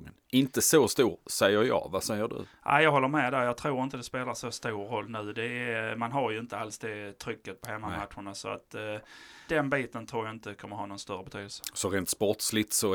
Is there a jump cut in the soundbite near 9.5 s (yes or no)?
yes